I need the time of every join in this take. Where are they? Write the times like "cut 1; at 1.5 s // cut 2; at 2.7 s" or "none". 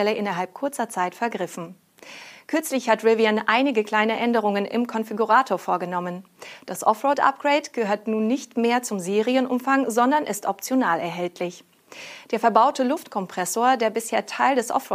none